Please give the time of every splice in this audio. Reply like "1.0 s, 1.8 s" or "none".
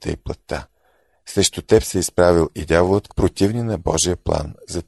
3.1 s